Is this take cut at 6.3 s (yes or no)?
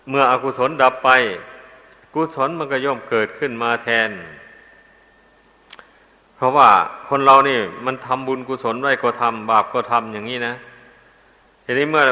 no